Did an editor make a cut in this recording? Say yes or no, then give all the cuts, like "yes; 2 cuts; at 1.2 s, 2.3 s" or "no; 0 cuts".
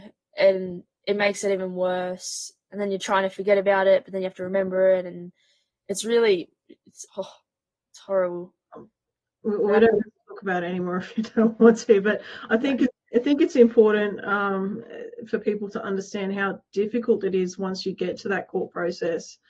yes; 1 cut; at 7.1 s